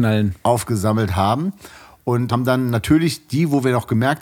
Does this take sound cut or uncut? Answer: cut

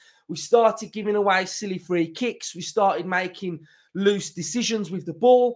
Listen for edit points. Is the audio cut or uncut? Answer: uncut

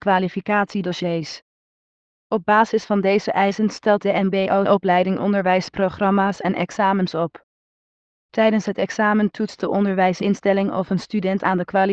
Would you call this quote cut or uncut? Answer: uncut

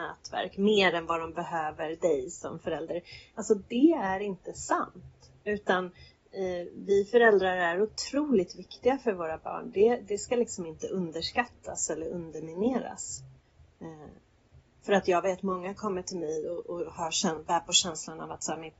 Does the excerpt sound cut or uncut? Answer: uncut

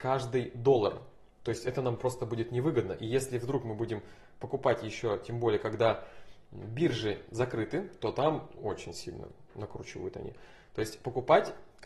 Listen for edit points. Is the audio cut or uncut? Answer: cut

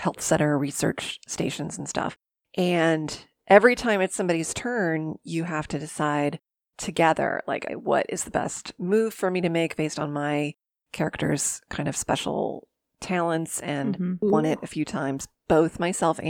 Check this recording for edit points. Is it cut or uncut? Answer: cut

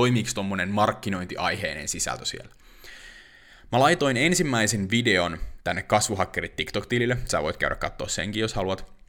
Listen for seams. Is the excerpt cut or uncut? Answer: uncut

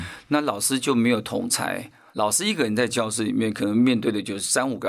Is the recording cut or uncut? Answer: uncut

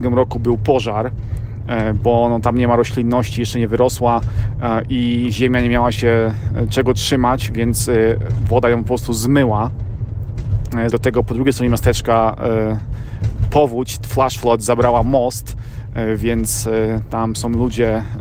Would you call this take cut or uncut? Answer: cut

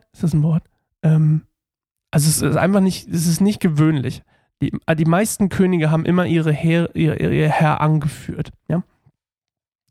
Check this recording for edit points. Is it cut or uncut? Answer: uncut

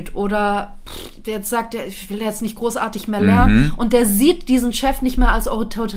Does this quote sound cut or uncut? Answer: uncut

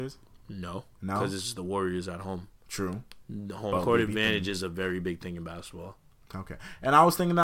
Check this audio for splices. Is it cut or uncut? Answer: cut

